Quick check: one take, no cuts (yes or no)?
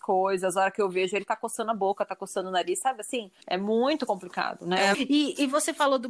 no